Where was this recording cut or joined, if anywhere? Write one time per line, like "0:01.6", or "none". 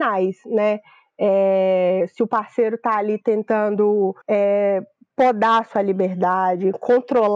0:04.2